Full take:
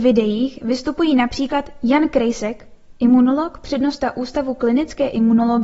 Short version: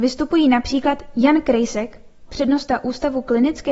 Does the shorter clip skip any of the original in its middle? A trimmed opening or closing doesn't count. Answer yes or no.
yes